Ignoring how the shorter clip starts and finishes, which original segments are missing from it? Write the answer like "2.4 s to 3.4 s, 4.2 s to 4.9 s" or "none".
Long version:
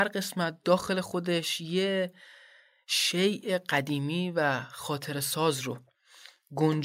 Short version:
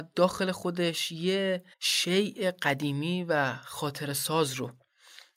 2.2 s to 2.8 s